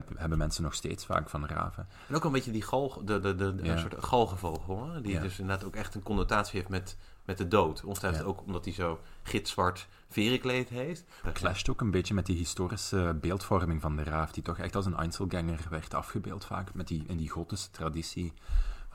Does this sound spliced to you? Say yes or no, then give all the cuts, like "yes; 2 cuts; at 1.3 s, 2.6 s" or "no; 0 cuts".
yes; 1 cut; at 11.2 s